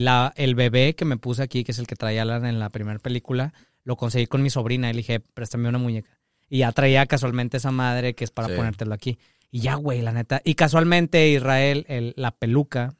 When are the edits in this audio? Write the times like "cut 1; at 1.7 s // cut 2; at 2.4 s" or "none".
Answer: none